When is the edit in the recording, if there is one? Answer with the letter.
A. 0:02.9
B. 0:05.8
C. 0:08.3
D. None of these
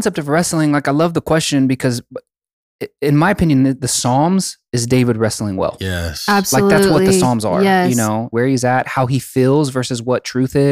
C